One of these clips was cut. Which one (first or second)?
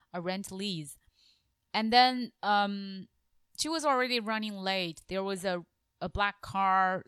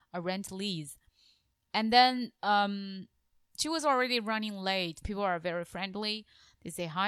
second